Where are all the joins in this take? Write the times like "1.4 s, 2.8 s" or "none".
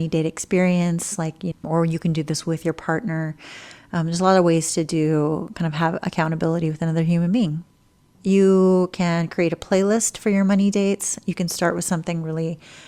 1.5 s, 8.1 s